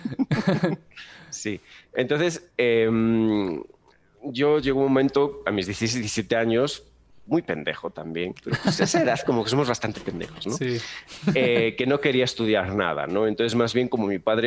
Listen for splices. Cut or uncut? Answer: uncut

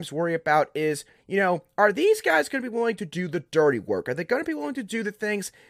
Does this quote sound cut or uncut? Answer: uncut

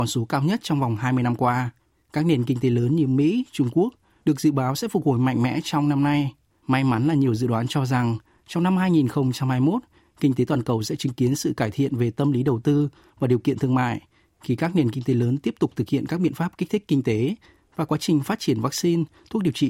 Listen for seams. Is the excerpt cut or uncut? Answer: cut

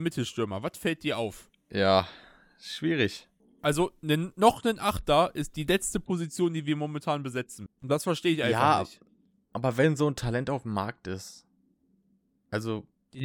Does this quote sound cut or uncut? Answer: uncut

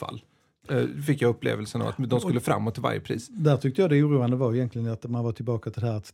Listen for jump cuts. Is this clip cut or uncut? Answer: uncut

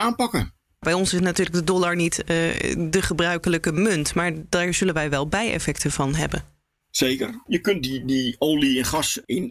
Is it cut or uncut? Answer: uncut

